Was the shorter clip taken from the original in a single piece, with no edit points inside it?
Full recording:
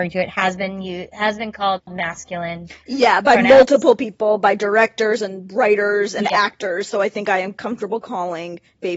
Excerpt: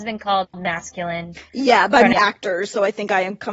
no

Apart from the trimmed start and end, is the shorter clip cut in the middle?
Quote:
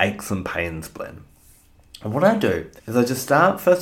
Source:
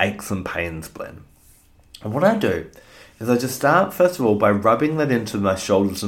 yes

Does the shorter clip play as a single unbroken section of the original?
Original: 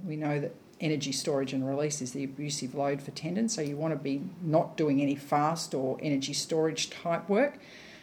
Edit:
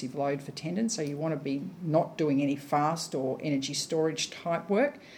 yes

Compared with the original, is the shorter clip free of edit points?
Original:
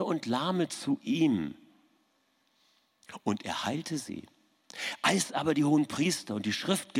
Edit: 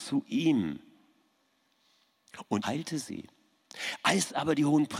no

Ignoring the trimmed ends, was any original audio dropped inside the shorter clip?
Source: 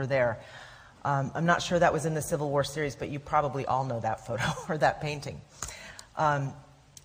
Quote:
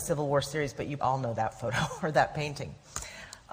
yes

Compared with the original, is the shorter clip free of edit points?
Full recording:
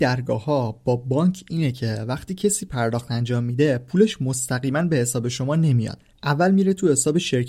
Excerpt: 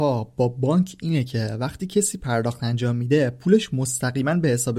yes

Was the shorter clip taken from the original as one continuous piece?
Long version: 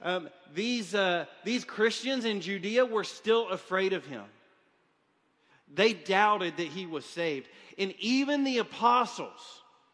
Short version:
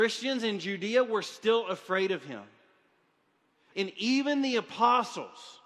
no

